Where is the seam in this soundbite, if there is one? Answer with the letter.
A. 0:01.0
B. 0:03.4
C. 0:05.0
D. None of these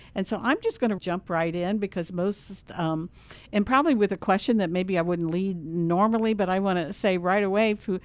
A